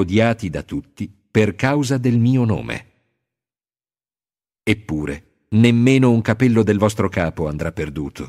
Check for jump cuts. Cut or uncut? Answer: uncut